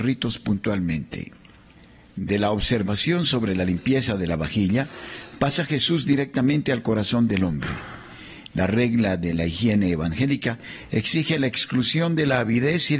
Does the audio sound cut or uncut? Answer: uncut